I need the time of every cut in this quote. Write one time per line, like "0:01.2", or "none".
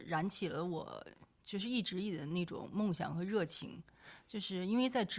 none